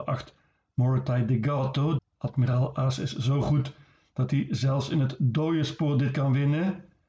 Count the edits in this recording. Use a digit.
1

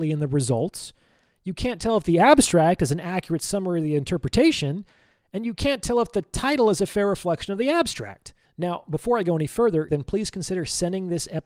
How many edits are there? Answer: 2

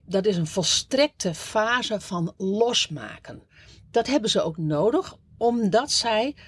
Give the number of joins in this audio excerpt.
0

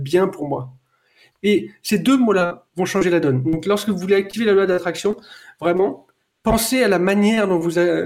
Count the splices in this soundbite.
1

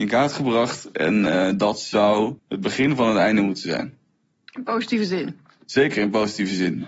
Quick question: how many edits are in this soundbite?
1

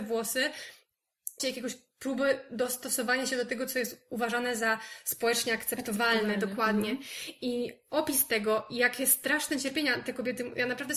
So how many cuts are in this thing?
1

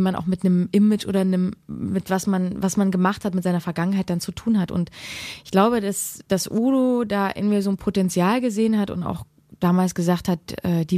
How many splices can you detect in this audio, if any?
0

